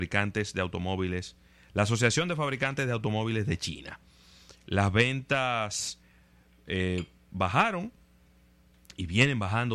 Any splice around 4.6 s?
no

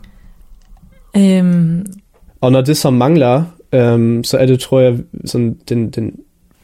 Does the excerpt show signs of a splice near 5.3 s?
yes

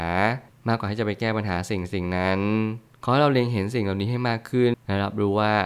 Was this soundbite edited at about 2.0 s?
no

